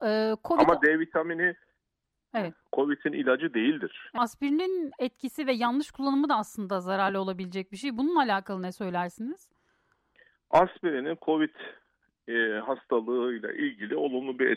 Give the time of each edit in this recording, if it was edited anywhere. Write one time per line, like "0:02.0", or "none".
0:04.2

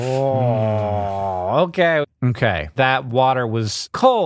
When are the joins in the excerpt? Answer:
0:02.0

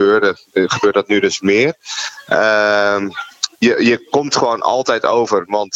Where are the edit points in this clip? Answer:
0:03.5

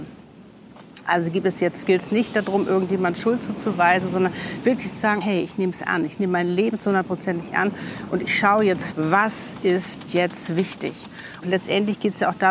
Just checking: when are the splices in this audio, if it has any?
0:05.2
0:08.9
0:11.4

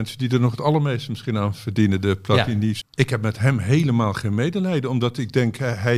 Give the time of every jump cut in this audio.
0:02.8

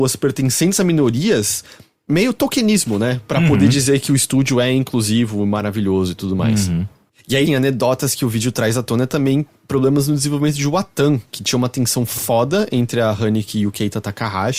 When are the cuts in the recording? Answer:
0:07.5

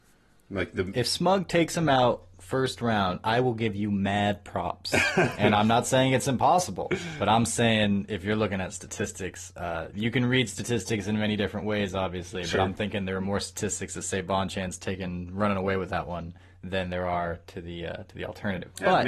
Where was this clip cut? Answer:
none

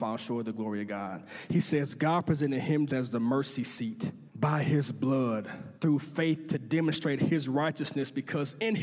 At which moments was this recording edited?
0:02.9
0:04.3
0:05.7

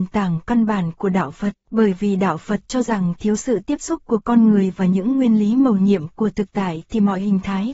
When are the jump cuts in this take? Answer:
0:01.6

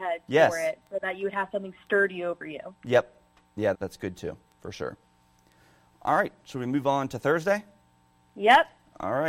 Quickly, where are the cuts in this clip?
0:03.7

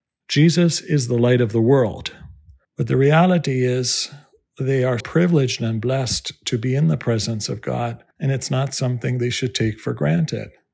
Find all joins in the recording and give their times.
0:02.6
0:05.0
0:08.1

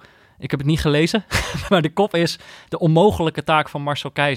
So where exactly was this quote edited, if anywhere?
0:01.7

